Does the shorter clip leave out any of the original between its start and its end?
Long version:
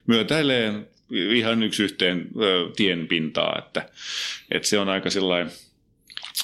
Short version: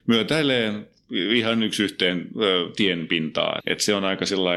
yes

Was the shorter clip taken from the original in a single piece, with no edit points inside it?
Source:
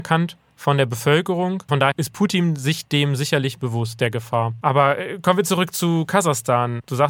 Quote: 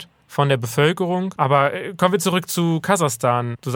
no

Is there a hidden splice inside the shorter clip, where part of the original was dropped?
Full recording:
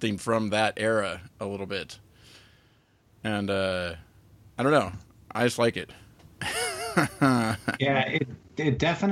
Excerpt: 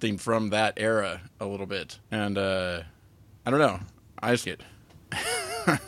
yes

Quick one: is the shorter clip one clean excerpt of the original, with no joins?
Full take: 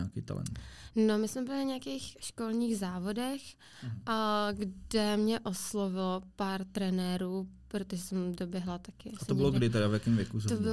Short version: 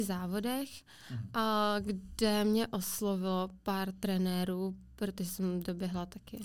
yes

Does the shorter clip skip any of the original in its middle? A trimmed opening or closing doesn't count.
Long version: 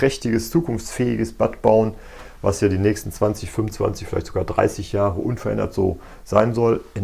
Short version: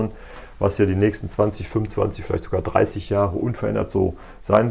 no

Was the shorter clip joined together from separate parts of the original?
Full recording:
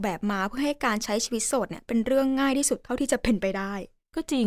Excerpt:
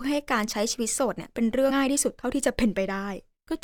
yes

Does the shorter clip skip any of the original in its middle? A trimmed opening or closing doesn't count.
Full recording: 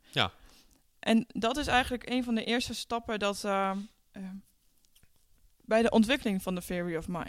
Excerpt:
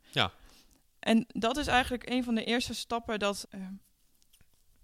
yes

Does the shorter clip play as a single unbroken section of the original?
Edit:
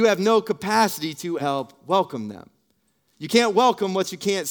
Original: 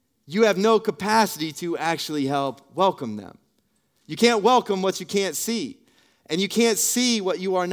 no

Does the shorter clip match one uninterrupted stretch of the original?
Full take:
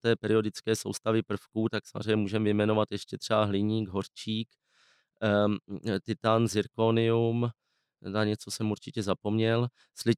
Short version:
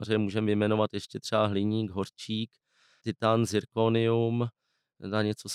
no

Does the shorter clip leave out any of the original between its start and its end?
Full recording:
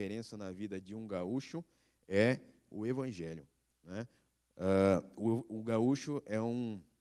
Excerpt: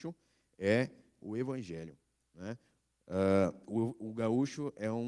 no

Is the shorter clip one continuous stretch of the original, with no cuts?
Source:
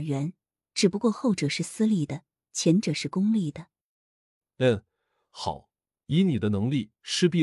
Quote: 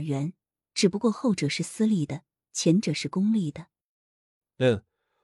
yes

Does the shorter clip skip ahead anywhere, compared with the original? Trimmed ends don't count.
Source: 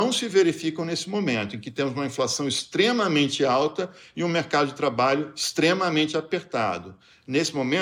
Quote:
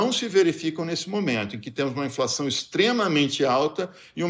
no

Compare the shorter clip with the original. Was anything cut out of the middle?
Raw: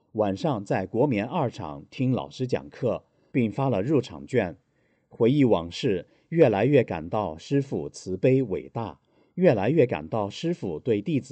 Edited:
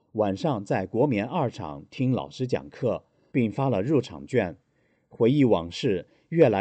no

